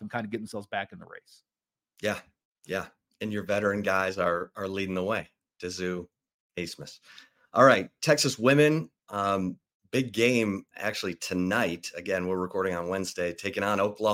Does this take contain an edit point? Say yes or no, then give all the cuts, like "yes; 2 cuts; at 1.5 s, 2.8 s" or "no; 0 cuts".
no; 0 cuts